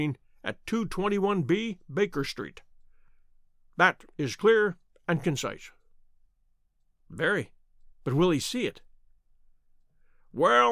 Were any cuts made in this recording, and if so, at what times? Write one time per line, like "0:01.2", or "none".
none